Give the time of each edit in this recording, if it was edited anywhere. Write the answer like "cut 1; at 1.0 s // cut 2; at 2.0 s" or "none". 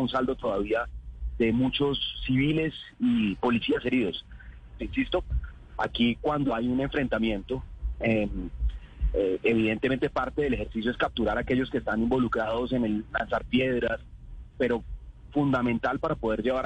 cut 1; at 4.8 s